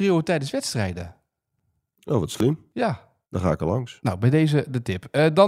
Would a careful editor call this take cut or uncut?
cut